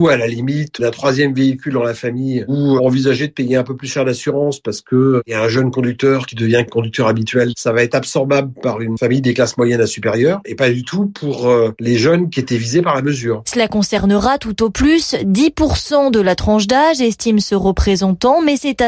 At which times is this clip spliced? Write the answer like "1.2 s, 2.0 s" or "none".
2.8 s